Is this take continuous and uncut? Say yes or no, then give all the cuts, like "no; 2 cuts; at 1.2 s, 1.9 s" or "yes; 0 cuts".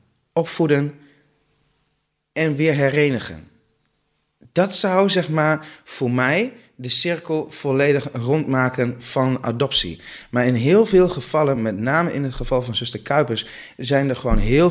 yes; 0 cuts